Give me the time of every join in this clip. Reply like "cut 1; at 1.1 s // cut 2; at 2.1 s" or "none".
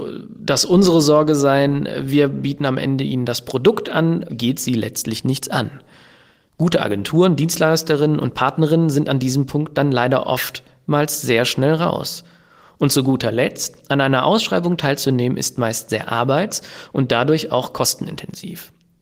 cut 1; at 4.3 s